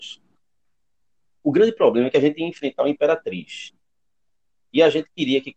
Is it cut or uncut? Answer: cut